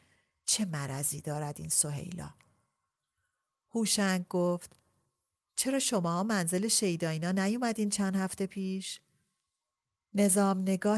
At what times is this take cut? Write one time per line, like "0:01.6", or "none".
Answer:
none